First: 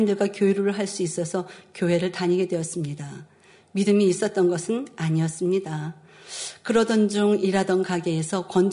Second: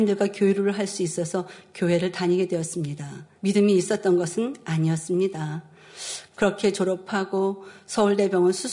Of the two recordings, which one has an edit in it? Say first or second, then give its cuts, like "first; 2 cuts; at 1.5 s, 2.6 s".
second; 2 cuts; at 3.4 s, 6.3 s